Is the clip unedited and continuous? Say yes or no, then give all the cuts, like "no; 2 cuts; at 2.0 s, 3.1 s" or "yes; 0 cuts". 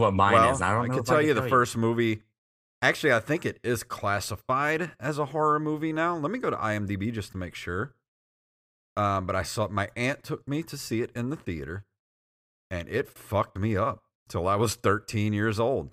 yes; 0 cuts